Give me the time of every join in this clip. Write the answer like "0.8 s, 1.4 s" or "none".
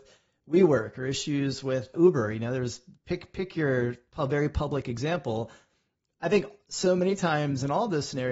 1.9 s